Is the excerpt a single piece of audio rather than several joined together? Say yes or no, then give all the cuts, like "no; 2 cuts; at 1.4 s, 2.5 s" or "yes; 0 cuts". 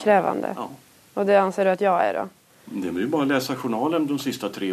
yes; 0 cuts